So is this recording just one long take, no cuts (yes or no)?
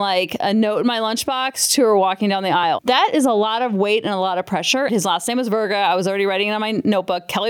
no